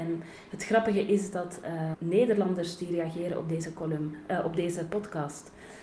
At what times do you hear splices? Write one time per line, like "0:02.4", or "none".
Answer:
0:01.9